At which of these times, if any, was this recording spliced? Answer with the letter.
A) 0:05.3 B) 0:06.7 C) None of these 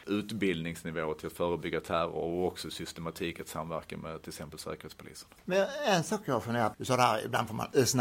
B